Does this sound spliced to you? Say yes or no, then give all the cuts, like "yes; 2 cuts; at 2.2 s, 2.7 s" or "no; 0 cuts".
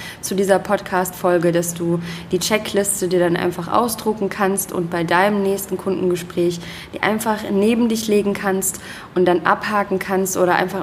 no; 0 cuts